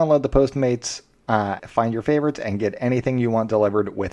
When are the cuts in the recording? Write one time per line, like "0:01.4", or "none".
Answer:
0:01.6